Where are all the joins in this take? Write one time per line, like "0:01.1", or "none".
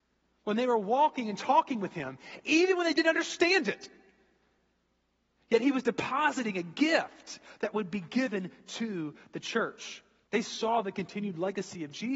0:10.2